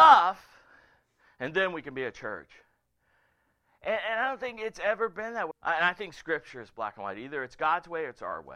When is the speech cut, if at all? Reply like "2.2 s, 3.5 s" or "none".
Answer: 5.5 s